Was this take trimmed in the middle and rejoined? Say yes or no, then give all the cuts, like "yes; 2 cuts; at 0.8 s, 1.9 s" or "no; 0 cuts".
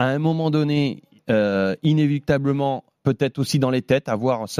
yes; 1 cut; at 3.0 s